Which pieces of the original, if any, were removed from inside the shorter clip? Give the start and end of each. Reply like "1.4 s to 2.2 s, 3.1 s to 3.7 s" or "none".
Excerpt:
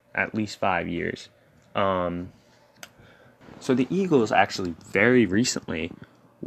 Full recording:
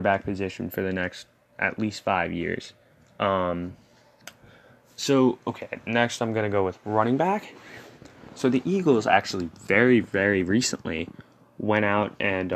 4.9 s to 8.2 s, 10.0 s to 10.4 s